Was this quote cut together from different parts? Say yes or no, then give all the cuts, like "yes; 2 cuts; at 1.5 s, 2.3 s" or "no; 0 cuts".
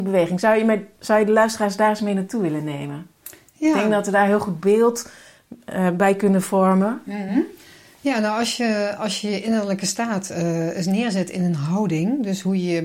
no; 0 cuts